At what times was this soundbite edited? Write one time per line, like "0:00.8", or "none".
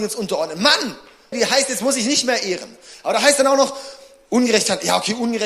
0:01.3